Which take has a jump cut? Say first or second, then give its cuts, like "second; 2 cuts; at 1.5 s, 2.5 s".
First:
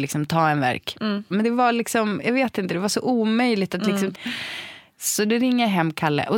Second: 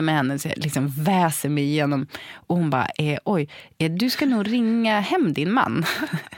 first; 2 cuts; at 1.3 s, 4.1 s